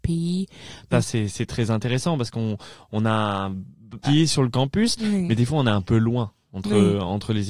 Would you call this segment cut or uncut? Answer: cut